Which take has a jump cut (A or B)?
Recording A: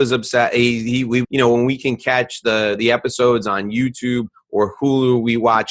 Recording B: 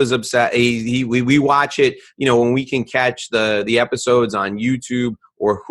A